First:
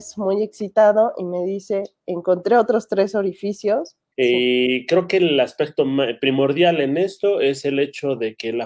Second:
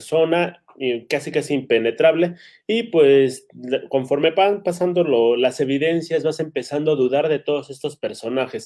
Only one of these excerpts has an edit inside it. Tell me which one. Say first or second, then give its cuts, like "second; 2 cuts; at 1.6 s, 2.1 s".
first; 1 cut; at 4.1 s